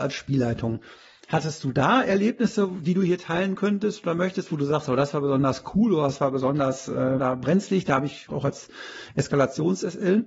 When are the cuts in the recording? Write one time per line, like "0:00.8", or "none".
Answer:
0:07.2
0:08.3